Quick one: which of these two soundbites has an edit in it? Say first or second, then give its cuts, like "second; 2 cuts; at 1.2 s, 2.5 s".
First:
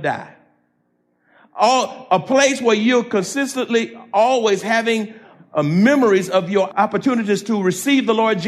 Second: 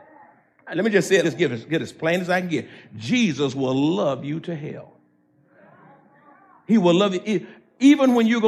second; 1 cut; at 1.2 s